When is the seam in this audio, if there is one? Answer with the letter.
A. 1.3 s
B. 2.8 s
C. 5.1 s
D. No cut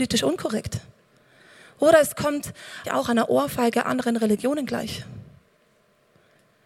B